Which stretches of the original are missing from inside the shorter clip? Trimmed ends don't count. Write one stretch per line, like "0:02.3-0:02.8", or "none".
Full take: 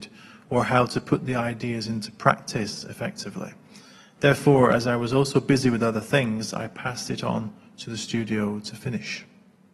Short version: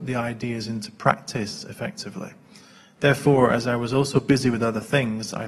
none

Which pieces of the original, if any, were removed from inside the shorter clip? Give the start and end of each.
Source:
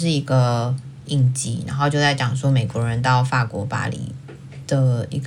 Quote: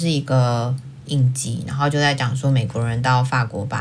none

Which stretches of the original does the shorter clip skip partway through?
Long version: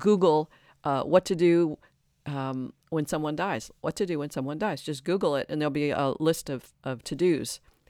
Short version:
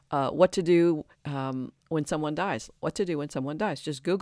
0:01.9-0:02.1

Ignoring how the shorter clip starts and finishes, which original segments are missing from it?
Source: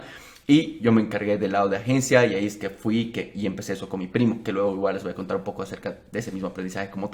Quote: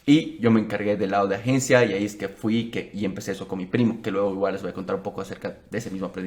none

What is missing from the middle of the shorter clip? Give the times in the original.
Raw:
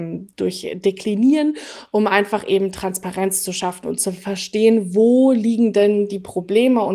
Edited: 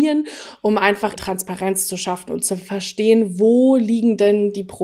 0:02.5-0:02.7

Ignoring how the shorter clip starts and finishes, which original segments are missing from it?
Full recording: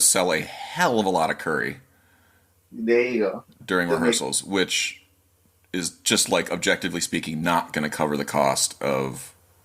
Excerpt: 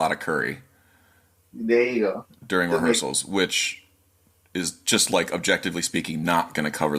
none

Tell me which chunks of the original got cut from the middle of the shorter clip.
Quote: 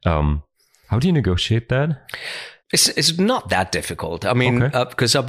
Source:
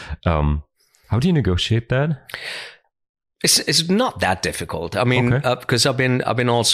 0:02.8-0:03.3

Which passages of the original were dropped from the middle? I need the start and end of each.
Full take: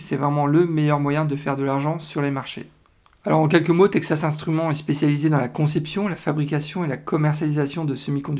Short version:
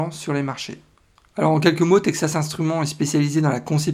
none

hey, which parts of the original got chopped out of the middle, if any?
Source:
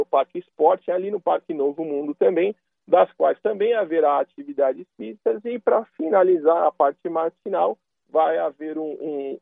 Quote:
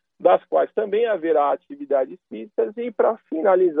none

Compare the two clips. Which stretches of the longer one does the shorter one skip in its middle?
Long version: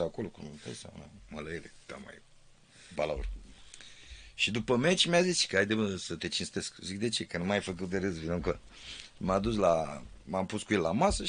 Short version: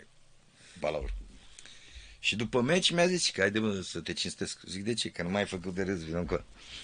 none

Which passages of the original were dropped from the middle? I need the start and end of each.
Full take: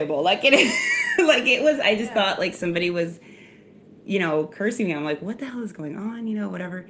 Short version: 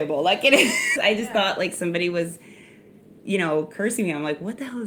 0:01.0-0:01.8

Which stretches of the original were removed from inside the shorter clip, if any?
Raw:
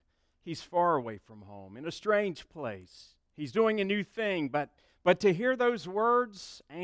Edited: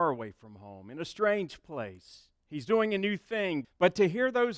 0:04.5-0:04.9

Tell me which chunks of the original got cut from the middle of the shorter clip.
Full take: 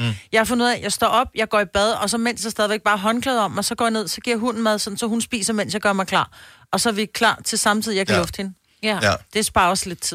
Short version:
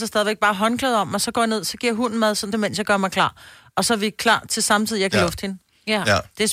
0:05.0-0:05.5

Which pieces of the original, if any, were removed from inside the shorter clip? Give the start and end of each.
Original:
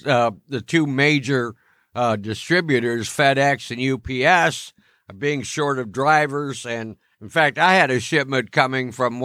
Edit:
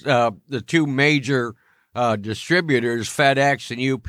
none

